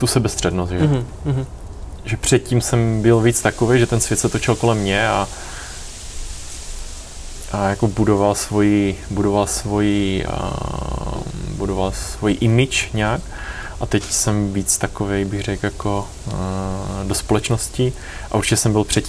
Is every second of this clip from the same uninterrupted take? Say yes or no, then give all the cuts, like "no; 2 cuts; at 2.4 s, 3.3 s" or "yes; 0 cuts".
yes; 0 cuts